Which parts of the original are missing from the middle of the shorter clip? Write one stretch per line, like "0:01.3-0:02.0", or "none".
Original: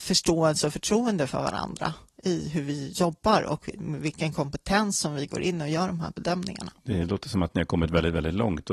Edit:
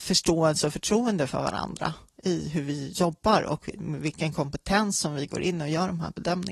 none